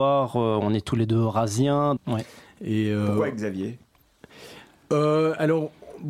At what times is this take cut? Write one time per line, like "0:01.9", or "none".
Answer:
0:02.0